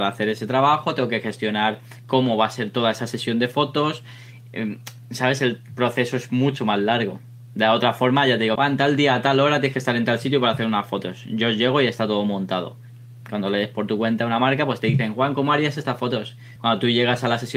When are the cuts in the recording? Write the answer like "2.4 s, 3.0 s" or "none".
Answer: 8.6 s, 16.6 s